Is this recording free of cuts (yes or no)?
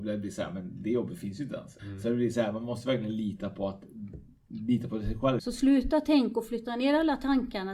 no